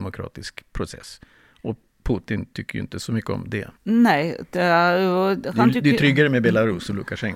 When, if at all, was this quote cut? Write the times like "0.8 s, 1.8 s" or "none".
3.8 s